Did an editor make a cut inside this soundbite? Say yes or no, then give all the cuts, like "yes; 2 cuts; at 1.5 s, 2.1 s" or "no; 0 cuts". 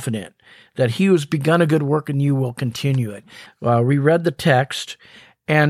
yes; 1 cut; at 3.5 s